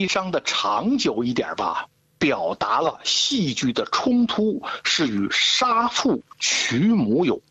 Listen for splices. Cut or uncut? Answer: cut